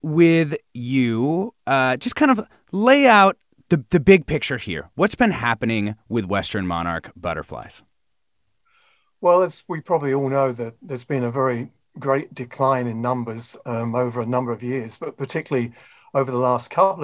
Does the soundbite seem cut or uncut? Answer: uncut